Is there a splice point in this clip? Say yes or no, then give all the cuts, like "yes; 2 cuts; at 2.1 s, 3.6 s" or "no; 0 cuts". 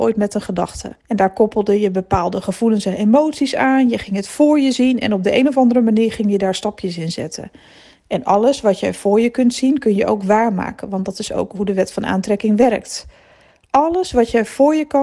yes; 1 cut; at 1.0 s